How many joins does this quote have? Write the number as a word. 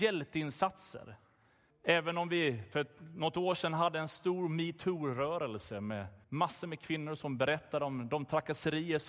two